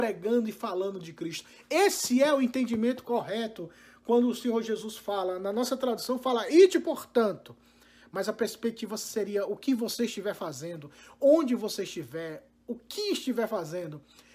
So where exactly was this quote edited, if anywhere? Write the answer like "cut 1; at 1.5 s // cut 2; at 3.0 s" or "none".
none

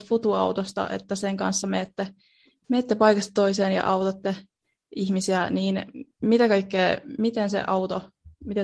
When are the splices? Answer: none

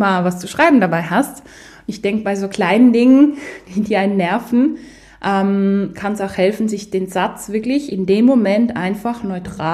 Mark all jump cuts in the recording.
none

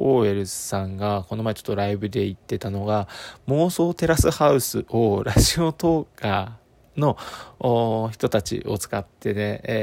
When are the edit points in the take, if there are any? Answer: none

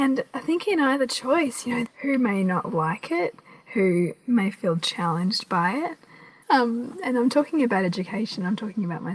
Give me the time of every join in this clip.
cut 1; at 1.9 s // cut 2; at 6.4 s

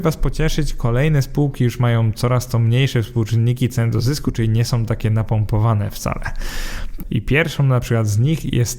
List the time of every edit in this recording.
cut 1; at 7.0 s

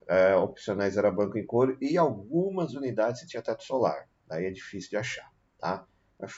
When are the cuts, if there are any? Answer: none

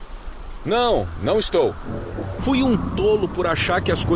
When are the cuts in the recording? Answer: cut 1; at 2.4 s

